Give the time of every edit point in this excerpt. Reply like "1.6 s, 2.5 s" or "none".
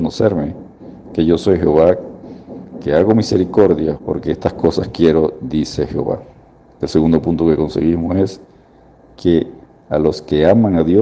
3.9 s